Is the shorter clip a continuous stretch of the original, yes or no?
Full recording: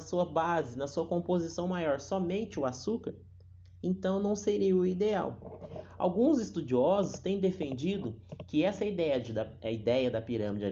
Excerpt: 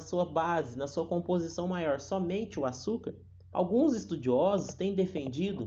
no